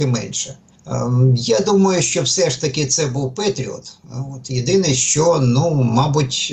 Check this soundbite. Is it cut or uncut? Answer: uncut